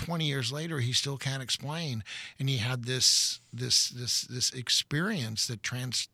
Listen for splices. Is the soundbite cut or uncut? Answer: uncut